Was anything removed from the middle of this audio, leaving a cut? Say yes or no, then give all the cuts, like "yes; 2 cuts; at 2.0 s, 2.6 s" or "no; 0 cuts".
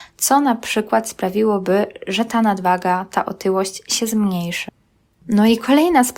no; 0 cuts